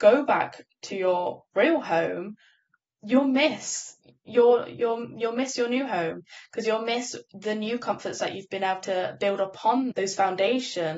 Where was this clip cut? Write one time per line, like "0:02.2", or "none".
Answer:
0:09.9